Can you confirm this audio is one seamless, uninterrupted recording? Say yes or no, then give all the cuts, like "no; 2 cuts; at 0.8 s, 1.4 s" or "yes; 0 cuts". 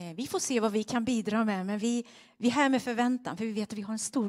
yes; 0 cuts